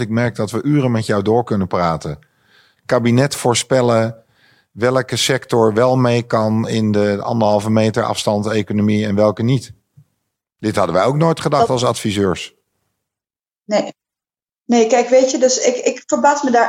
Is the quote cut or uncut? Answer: cut